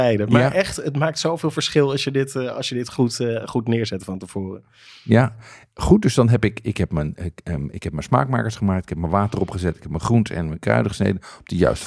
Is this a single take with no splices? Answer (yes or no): yes